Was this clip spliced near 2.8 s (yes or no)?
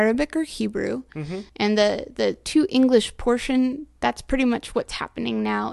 no